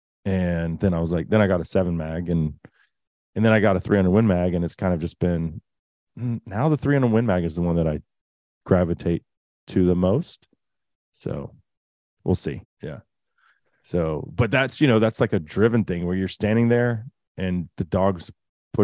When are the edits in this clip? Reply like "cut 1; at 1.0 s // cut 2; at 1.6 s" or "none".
cut 1; at 10.9 s // cut 2; at 12.6 s